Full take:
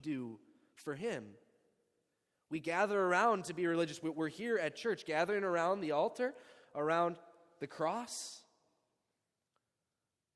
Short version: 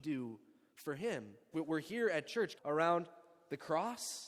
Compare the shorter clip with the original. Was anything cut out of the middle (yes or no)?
yes